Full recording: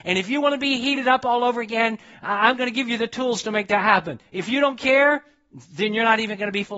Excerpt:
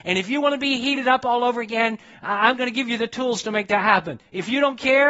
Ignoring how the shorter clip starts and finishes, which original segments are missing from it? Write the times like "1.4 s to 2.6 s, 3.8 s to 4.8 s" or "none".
none